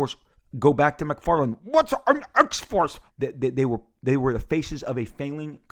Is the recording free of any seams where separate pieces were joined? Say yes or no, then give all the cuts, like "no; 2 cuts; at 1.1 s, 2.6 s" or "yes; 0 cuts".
no; 1 cut; at 3.1 s